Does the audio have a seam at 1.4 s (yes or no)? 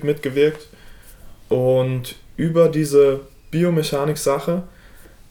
no